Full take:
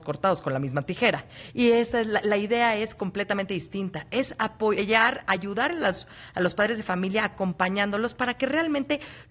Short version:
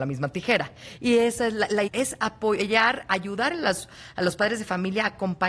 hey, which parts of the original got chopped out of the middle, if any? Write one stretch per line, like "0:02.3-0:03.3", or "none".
0:02.4-0:04.0